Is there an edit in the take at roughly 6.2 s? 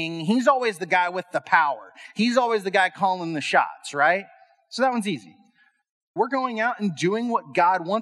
yes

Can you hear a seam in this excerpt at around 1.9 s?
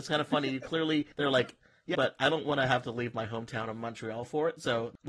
yes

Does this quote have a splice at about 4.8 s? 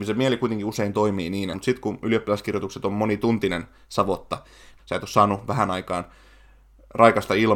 yes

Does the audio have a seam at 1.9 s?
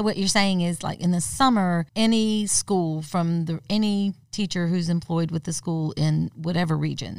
yes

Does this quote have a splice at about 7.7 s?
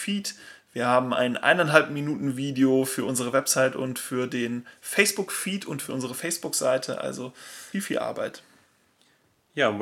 yes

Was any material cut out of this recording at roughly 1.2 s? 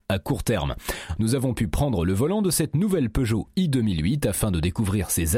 yes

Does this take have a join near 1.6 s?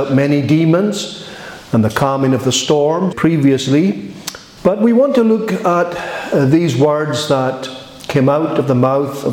no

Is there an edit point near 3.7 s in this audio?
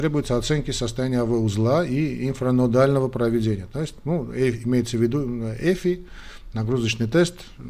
no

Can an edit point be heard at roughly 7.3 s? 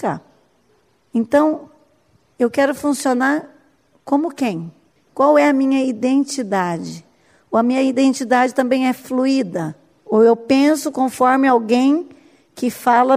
no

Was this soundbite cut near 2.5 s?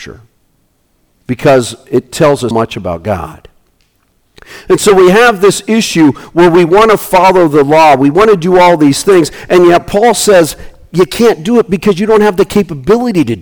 yes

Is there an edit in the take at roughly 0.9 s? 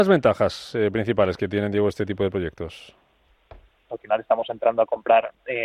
no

